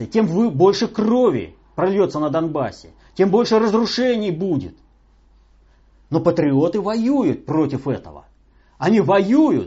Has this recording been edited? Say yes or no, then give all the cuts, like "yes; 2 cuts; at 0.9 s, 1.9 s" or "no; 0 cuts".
no; 0 cuts